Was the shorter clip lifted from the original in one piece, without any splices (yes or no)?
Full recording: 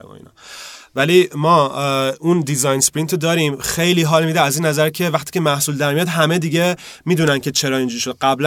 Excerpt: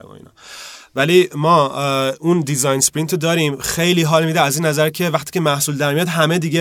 yes